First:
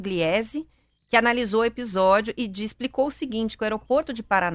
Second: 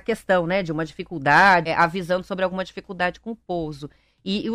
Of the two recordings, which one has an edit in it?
second; 1 cut; at 1.7 s

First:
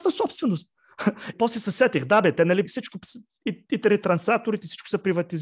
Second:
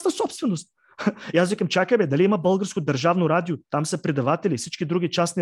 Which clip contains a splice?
first; 2 cuts; at 1.3 s, 2.7 s

